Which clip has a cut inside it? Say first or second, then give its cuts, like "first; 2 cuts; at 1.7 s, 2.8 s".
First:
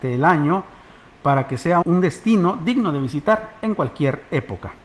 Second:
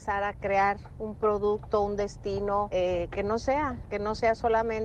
first; 1 cut; at 1.8 s